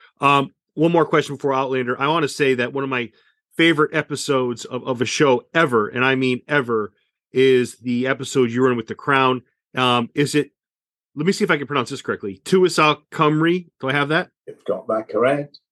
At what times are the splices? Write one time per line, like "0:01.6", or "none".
0:14.4